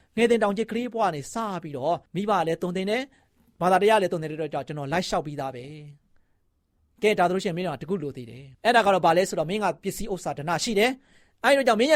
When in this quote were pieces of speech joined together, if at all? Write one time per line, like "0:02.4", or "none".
0:02.1
0:08.5